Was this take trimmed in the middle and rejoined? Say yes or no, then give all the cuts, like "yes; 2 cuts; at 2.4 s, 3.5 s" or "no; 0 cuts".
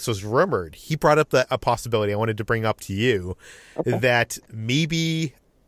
no; 0 cuts